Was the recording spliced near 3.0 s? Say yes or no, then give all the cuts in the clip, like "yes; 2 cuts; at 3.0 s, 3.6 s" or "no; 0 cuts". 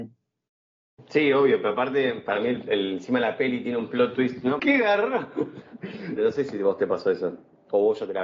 no; 2 cuts; at 4.6 s, 6.2 s